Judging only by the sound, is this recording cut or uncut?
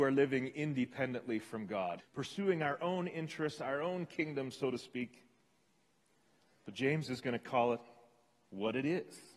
cut